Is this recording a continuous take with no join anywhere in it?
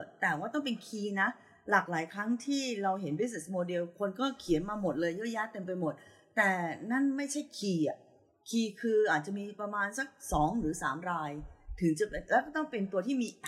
yes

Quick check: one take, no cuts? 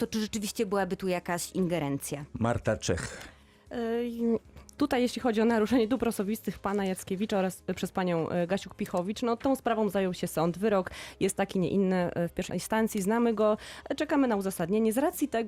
no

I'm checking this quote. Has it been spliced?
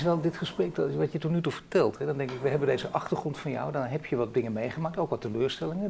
no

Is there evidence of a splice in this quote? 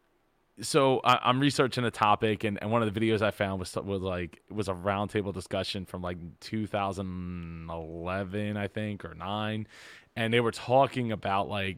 no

